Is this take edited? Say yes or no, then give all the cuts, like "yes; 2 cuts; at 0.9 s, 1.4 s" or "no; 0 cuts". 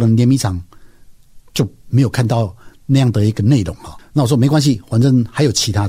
no; 0 cuts